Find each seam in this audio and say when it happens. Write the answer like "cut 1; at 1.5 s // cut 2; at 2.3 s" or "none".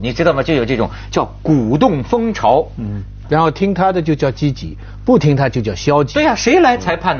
cut 1; at 3.2 s